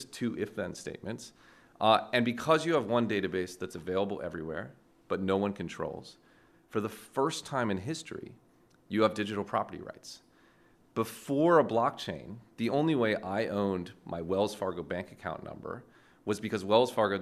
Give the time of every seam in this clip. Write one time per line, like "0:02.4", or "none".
none